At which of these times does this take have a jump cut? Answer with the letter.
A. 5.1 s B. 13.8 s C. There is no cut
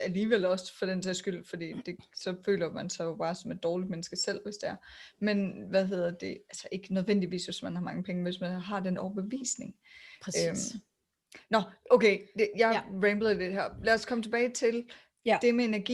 C